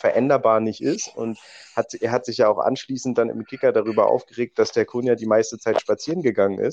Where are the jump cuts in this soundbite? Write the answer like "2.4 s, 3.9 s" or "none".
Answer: none